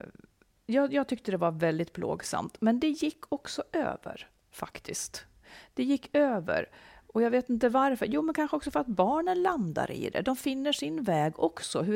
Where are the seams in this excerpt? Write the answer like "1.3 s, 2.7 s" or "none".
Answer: none